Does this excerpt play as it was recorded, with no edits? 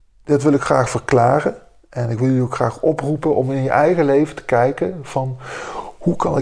yes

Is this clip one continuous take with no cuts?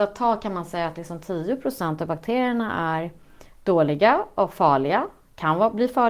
yes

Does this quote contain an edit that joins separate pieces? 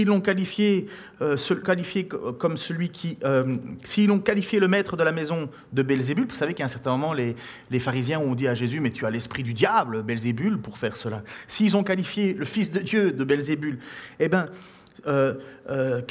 yes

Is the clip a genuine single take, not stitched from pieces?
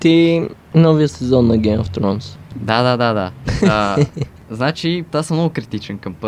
no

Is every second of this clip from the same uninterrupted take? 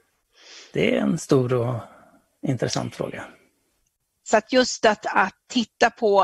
no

